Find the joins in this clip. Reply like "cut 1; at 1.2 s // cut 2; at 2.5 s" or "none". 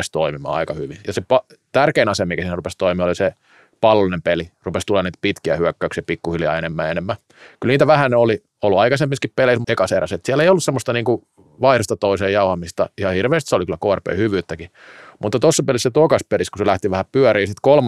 cut 1; at 9.6 s